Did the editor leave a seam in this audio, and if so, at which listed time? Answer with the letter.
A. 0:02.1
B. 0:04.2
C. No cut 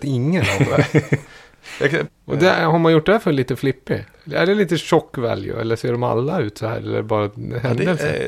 A